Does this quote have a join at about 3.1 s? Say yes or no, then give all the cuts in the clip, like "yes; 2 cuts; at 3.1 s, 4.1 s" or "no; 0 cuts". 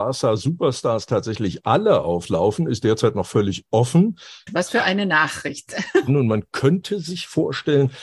no; 2 cuts; at 4.5 s, 6.1 s